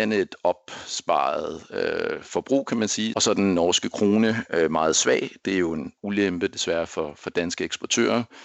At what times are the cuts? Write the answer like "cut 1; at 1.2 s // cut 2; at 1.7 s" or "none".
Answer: cut 1; at 3.1 s